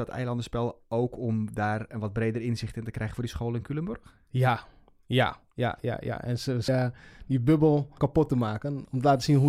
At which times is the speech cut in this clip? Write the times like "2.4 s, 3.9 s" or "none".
6.7 s, 8.0 s